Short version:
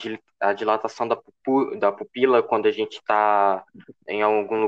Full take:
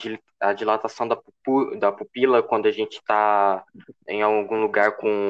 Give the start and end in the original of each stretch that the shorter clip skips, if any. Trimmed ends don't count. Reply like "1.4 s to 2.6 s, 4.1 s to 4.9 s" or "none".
none

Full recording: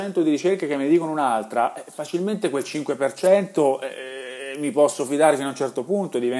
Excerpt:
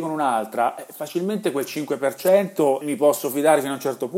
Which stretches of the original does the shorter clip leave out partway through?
3.8 s to 4.6 s

